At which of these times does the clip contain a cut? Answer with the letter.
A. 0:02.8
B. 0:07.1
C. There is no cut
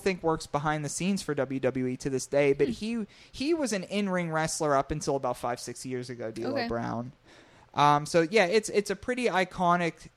C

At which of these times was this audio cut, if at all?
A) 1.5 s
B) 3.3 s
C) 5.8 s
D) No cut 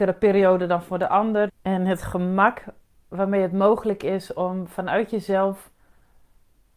A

